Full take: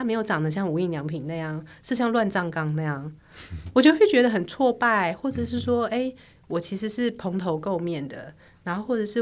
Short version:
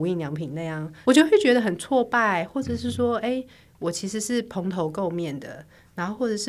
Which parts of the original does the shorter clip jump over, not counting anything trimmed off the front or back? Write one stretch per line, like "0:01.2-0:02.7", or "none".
0:01.8-0:03.7